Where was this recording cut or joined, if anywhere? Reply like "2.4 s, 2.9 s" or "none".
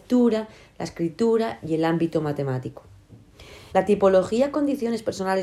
3.7 s